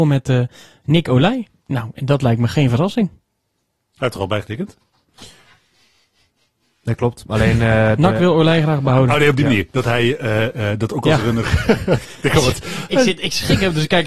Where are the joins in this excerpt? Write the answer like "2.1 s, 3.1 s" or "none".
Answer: none